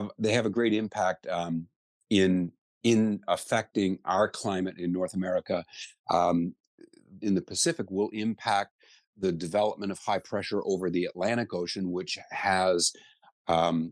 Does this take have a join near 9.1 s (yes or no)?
yes